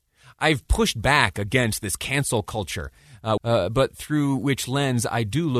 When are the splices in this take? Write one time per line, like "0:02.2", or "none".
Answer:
0:03.4